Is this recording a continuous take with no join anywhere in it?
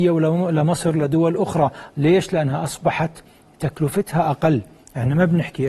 yes; 0 cuts

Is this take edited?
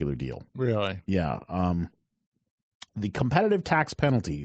no; 0 cuts

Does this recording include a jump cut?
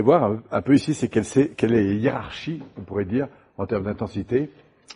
no; 0 cuts

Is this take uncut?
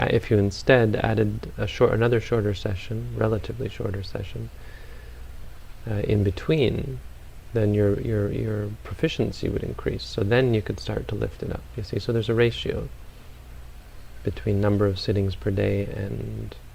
yes; 0 cuts

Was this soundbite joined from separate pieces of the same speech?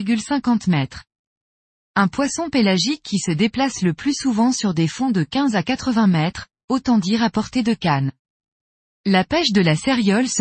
no; 0 cuts

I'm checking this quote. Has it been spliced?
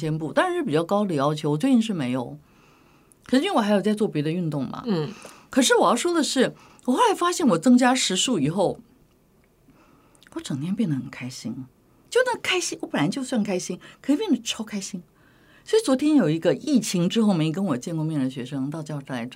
no; 0 cuts

